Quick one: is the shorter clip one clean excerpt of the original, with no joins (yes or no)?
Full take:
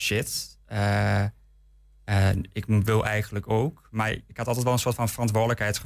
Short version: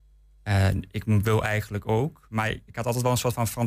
yes